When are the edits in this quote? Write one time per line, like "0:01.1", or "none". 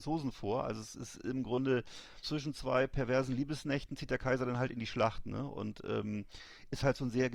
0:02.2